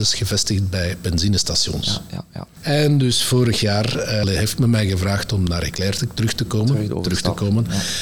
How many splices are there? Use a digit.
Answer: 0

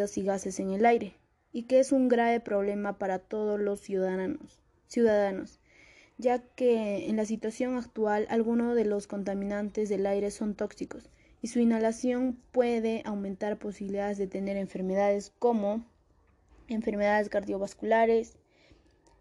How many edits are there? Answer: 0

